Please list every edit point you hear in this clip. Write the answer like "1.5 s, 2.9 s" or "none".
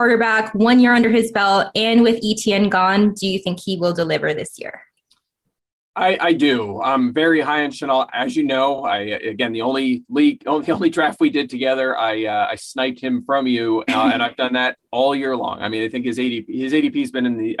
none